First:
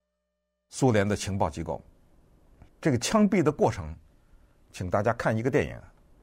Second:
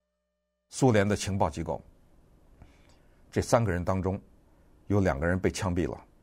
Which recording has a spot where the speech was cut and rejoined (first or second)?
first